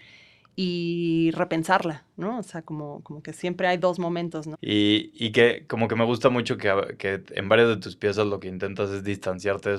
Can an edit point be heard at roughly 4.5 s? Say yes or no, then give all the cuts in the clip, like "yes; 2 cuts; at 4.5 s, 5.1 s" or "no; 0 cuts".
yes; 1 cut; at 4.5 s